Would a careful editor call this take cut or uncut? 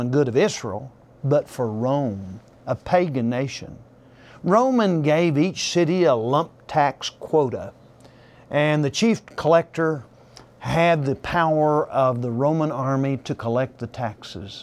uncut